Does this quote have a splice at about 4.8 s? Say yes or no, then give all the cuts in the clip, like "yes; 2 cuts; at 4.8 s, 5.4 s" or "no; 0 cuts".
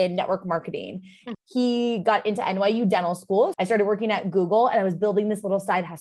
no; 2 cuts; at 1.3 s, 3.5 s